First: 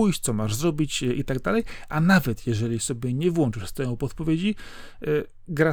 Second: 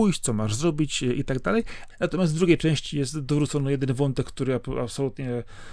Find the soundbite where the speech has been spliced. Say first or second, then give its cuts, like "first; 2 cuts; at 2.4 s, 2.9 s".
second; 1 cut; at 1.9 s